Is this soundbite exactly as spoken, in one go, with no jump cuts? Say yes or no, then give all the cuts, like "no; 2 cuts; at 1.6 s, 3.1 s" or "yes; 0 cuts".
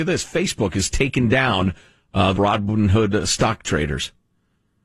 no; 1 cut; at 2.3 s